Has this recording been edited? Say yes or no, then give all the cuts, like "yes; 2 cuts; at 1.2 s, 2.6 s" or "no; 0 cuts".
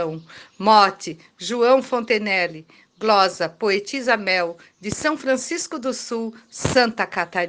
no; 0 cuts